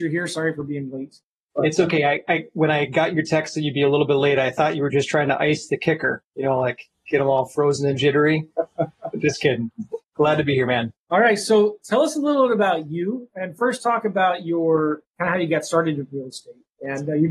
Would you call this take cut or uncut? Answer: uncut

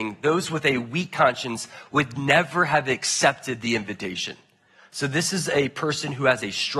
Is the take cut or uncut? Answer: uncut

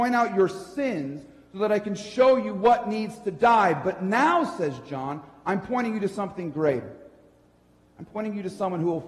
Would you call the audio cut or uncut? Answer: uncut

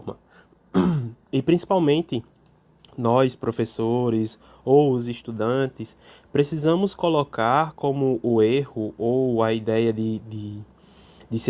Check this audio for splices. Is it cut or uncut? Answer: uncut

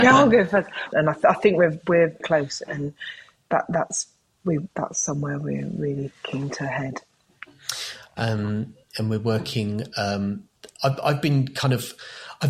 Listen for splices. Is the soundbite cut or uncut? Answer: cut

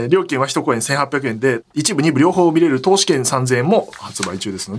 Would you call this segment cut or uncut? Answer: cut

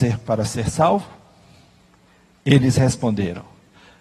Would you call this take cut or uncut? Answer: uncut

